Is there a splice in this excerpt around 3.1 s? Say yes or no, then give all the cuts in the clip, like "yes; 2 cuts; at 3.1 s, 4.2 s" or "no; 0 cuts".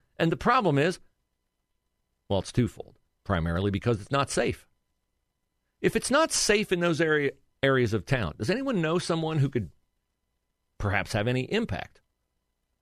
yes; 1 cut; at 3.1 s